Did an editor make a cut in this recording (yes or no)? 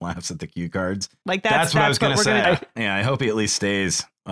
yes